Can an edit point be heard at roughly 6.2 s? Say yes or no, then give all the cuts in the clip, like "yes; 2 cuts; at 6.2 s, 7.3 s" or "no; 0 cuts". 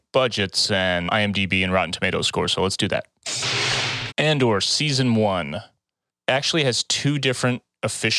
no; 2 cuts; at 1.1 s, 4.1 s